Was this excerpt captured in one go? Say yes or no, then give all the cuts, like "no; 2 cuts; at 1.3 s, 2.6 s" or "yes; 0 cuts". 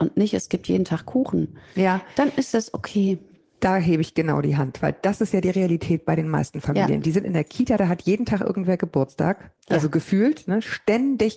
no; 1 cut; at 9.6 s